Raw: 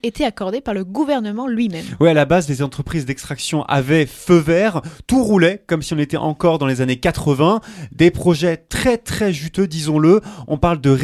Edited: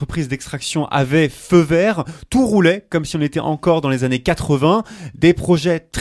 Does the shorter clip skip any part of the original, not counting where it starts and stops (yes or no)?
no